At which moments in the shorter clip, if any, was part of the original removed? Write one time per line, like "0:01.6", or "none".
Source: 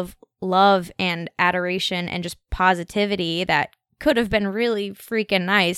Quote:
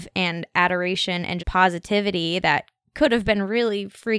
0:01.4